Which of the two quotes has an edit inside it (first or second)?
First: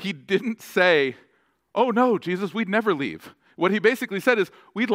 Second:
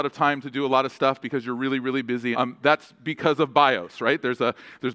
second